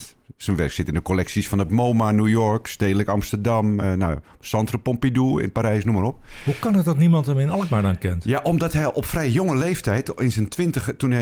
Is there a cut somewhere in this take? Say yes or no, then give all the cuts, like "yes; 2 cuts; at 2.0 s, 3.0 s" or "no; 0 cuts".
no; 0 cuts